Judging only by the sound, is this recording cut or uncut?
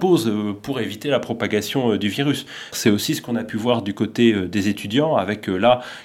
cut